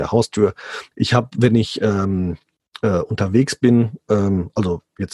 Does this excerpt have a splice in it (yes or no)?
yes